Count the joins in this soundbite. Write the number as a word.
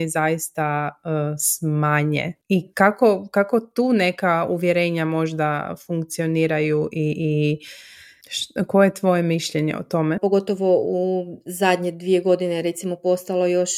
one